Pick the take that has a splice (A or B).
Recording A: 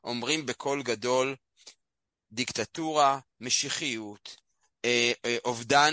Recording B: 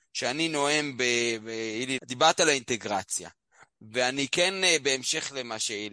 B